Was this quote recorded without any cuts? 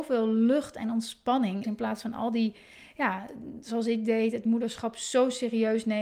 no; 1 cut; at 1.6 s

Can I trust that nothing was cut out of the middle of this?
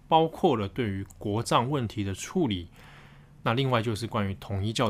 yes; 0 cuts

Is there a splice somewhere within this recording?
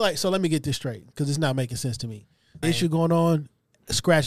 yes; 1 cut; at 2.6 s

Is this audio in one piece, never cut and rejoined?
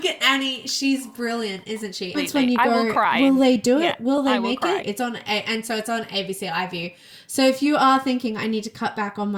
no; 2 cuts; at 2.1 s, 4.8 s

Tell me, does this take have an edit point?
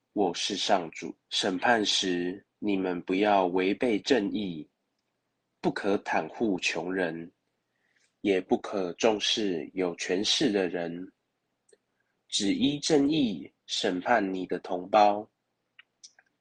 yes; 2 cuts; at 1.2 s, 2.5 s

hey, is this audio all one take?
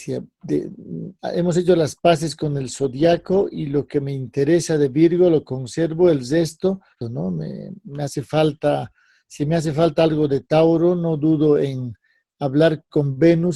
no; 1 cut; at 7.0 s

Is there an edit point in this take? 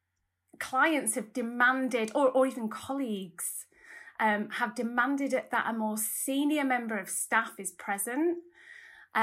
no; 0 cuts

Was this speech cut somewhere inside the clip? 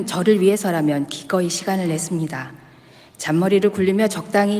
no; 0 cuts

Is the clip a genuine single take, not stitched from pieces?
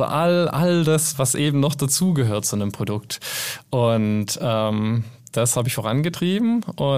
no; 1 cut; at 1.1 s

